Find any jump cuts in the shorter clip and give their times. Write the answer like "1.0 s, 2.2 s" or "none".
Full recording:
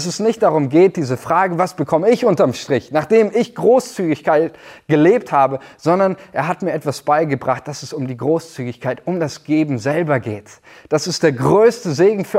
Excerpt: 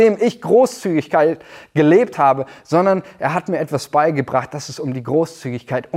none